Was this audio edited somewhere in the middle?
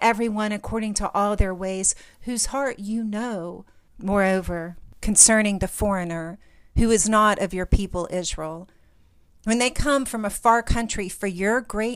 yes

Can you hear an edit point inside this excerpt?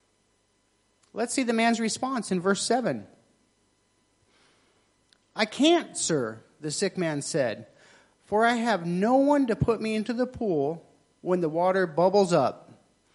no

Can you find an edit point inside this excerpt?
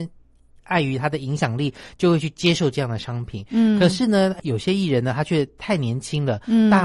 yes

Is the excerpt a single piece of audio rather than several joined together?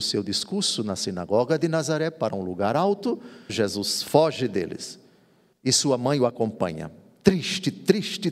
no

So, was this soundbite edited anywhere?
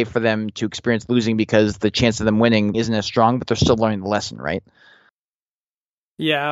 yes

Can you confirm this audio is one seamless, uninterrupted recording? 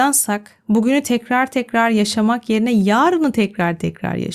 yes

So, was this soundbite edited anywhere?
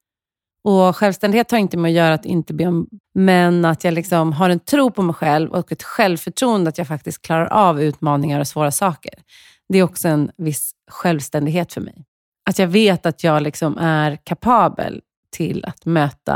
yes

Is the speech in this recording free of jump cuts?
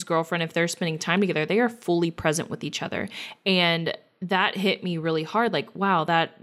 yes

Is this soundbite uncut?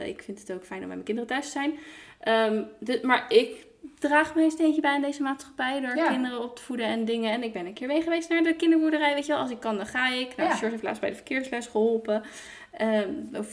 yes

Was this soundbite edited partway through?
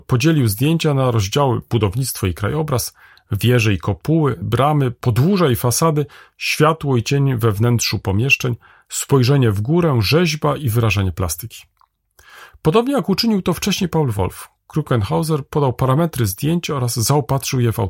yes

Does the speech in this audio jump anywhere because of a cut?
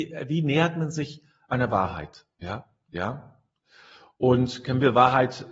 yes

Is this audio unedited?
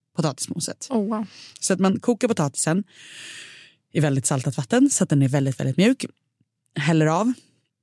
yes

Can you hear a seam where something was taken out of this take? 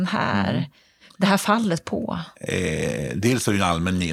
no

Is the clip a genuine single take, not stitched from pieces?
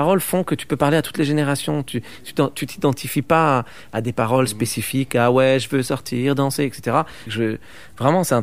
no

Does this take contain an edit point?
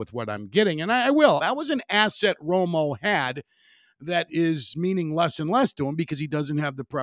yes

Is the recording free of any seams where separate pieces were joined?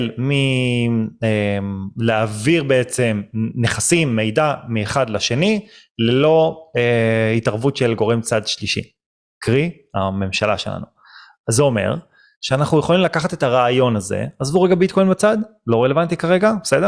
yes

